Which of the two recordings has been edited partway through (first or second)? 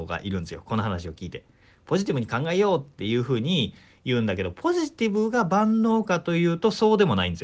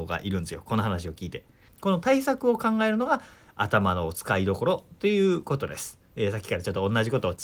second